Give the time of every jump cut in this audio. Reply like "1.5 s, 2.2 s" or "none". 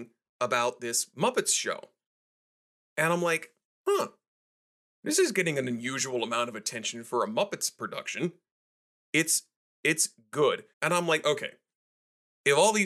9.0 s, 10.7 s